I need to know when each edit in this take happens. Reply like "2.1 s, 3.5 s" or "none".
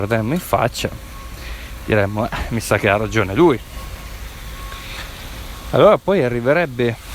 none